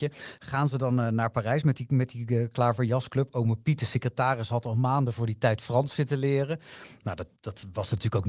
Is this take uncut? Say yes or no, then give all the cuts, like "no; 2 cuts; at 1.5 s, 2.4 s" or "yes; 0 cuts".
no; 1 cut; at 7.4 s